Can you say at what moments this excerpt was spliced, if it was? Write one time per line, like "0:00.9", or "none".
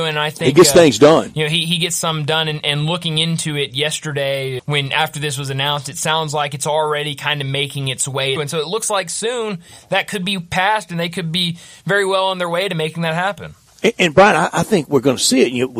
0:04.6
0:08.4